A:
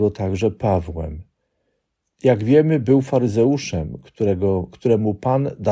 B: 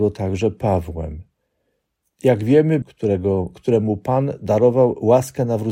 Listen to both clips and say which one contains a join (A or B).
B